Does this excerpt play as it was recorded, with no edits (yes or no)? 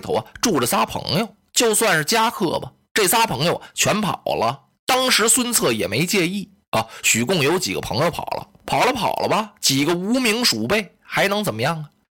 yes